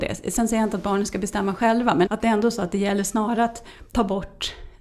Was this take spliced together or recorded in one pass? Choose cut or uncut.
cut